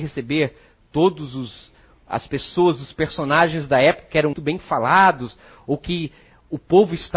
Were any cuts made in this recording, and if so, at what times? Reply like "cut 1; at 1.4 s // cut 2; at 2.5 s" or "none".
cut 1; at 4.3 s

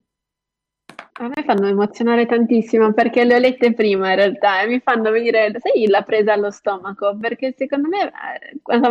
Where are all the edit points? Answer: cut 1; at 1.1 s

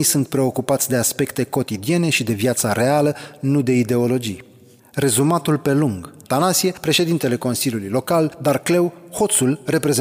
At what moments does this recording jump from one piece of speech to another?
cut 1; at 6.2 s

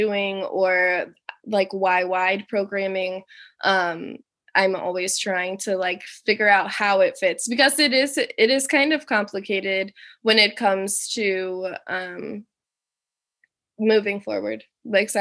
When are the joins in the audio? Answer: none

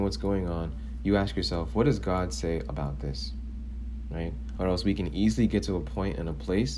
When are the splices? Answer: cut 1; at 4.6 s

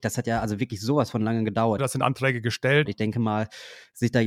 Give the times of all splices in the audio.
cut 1; at 1.8 s // cut 2; at 2.9 s

